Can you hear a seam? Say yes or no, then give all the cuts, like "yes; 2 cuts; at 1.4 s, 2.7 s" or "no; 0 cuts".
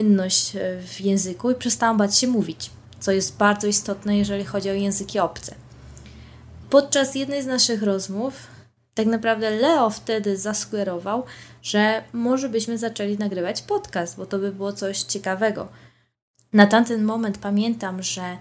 no; 0 cuts